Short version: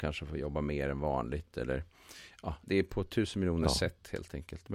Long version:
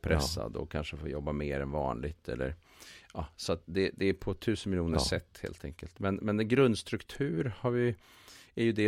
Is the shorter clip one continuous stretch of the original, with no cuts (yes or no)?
no